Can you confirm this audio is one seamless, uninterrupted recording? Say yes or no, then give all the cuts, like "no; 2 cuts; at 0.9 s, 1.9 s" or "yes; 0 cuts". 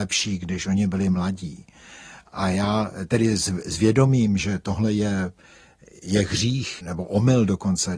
yes; 0 cuts